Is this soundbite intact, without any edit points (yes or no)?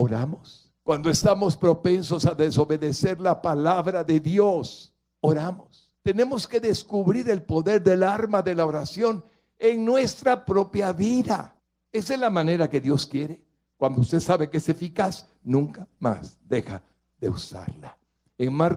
yes